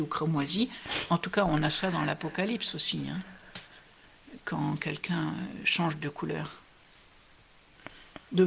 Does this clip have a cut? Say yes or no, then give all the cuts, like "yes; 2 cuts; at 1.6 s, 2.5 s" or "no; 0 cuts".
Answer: no; 0 cuts